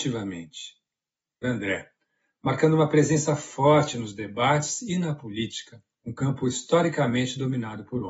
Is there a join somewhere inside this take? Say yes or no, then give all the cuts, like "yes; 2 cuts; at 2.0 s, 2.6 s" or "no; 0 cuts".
yes; 2 cuts; at 1.4 s, 5.9 s